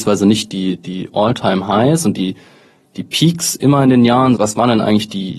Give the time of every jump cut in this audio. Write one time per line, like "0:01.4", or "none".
0:04.4